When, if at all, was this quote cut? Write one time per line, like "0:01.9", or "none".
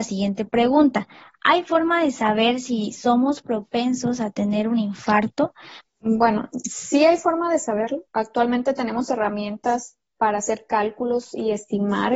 0:05.8
0:08.1